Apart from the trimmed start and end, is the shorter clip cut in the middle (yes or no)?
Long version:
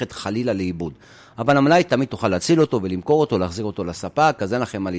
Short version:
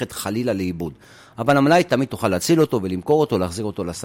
no